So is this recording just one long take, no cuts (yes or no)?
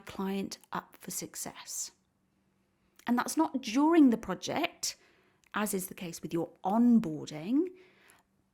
yes